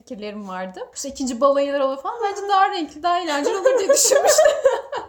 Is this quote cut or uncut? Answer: cut